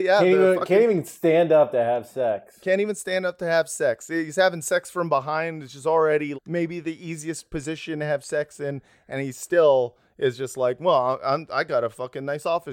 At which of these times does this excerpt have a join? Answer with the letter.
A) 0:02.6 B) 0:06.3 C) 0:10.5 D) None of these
B